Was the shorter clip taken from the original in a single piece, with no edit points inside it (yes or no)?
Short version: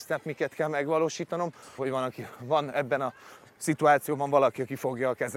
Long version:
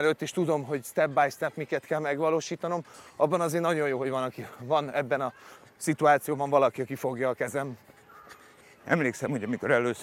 no